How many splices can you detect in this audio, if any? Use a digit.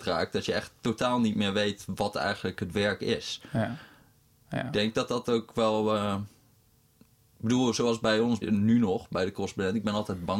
2